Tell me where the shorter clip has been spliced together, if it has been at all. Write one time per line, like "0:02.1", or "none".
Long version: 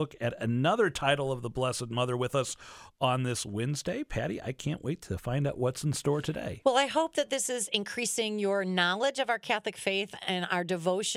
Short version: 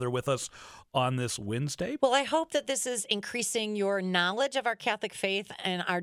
0:02.0